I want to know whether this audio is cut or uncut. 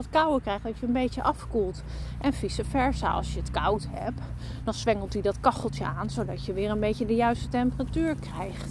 uncut